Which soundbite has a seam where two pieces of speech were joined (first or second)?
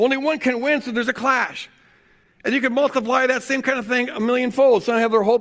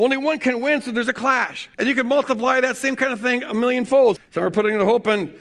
second